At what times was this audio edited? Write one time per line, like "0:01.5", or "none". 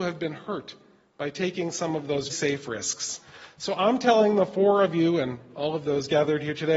0:02.3